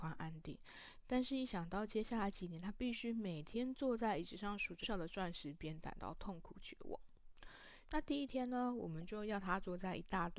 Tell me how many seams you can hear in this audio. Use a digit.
2